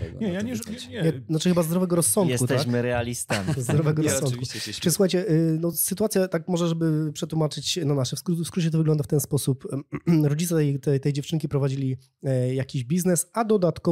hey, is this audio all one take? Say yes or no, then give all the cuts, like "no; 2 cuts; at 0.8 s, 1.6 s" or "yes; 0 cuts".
yes; 0 cuts